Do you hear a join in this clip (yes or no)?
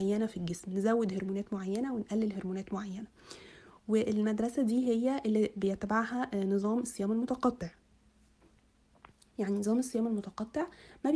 no